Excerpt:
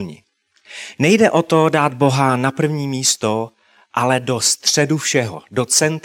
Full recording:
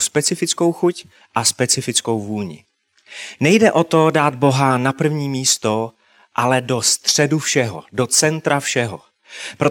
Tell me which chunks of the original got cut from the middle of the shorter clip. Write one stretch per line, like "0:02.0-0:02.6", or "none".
none